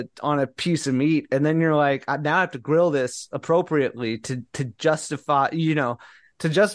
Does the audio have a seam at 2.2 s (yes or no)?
no